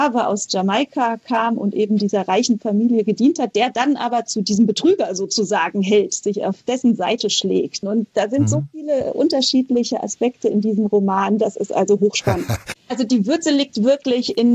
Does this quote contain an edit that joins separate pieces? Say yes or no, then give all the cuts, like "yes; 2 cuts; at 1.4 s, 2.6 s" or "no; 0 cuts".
yes; 2 cuts; at 7.8 s, 12.7 s